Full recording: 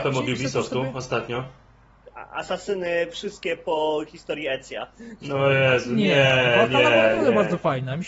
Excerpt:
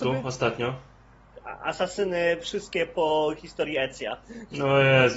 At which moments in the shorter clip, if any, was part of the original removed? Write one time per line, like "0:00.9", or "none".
none